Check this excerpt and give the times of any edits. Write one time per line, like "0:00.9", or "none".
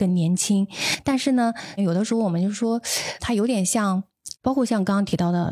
0:01.8
0:03.2
0:04.3